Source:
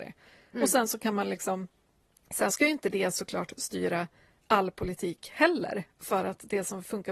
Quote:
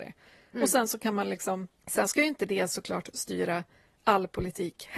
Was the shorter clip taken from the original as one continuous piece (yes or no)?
no